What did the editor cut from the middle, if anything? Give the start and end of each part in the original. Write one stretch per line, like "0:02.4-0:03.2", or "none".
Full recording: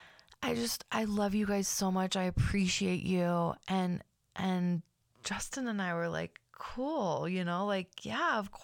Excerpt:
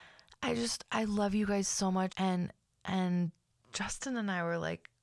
0:02.1-0:03.6